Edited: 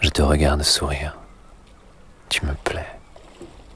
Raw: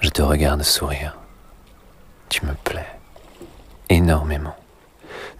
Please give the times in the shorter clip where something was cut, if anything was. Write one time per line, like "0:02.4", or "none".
none

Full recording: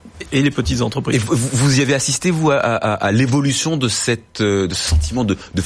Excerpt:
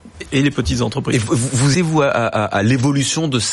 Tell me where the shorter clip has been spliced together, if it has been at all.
0:01.7

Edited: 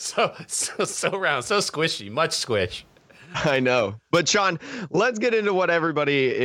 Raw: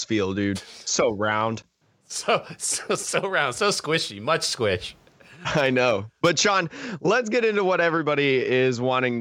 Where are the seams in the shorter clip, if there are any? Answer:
none

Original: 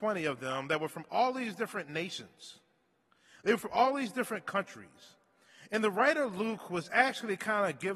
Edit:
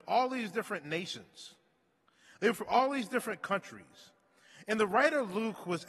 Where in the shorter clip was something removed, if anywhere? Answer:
none

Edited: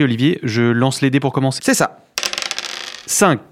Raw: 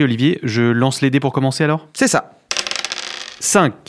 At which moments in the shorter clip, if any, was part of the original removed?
0:01.6

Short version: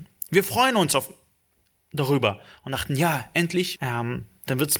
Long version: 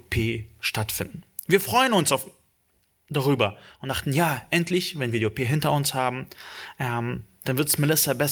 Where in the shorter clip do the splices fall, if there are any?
0:03.8

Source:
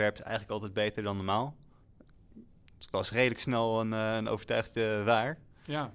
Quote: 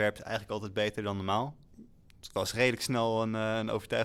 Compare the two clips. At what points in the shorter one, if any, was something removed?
0:01.7

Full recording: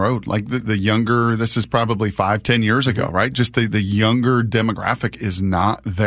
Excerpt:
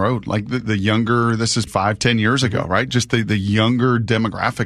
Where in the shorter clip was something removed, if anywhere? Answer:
0:01.7

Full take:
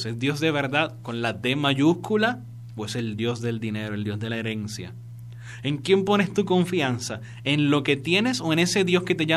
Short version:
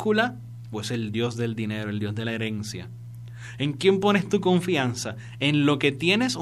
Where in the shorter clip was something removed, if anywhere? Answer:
none

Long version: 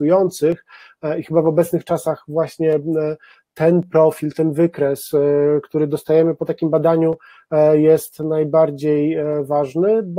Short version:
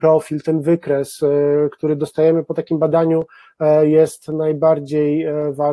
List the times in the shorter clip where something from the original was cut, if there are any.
none

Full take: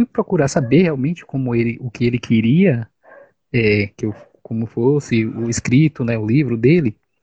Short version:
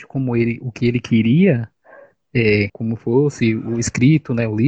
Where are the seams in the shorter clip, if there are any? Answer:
0:02.7

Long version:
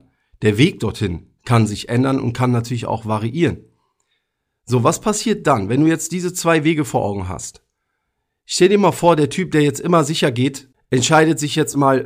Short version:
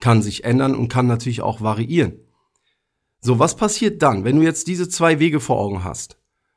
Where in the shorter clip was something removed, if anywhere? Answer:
none

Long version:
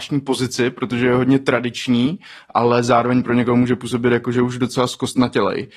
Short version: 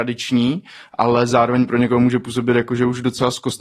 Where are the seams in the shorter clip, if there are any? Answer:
none

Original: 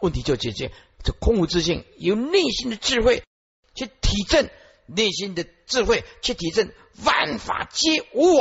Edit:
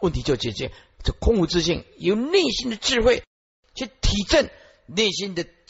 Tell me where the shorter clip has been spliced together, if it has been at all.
none

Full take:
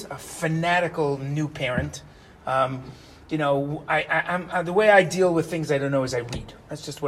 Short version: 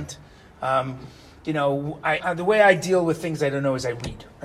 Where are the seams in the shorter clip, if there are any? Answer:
0:02.2

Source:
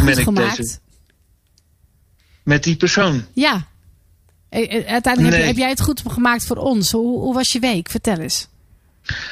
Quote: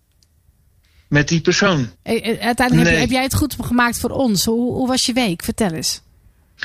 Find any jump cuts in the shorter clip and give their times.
0:01.9

